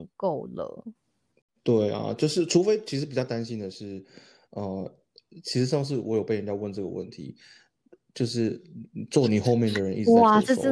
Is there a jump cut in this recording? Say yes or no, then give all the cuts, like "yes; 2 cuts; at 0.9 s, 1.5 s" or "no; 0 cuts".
no; 0 cuts